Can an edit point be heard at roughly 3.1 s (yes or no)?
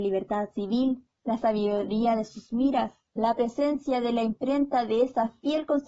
yes